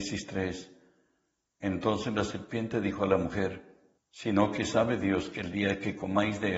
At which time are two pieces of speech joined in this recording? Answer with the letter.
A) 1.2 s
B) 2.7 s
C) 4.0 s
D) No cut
C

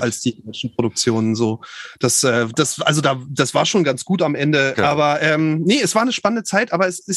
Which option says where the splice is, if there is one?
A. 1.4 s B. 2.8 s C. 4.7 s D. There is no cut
C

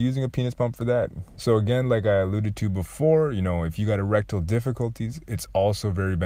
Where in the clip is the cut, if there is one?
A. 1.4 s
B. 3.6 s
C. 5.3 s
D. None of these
A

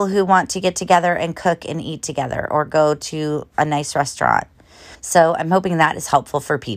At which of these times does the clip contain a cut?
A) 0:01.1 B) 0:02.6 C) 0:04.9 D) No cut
C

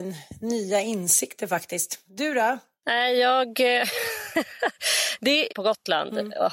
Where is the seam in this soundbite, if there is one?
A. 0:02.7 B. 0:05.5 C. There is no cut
B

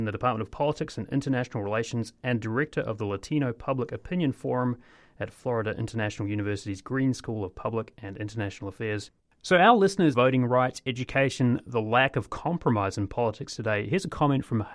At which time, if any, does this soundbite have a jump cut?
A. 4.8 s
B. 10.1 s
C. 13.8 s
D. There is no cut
B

